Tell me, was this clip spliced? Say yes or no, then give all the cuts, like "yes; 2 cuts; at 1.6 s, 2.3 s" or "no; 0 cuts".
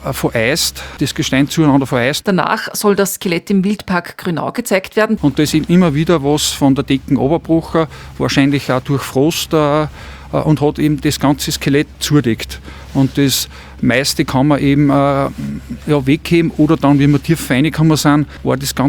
yes; 3 cuts; at 2.2 s, 5.2 s, 12.0 s